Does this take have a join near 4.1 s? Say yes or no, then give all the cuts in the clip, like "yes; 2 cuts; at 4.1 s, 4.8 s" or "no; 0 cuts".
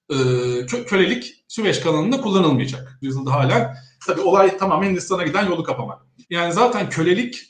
yes; 3 cuts; at 3.0 s, 4.1 s, 6.2 s